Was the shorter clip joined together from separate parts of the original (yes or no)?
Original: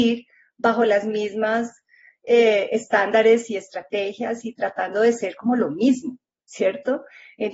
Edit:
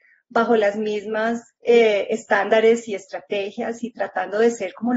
yes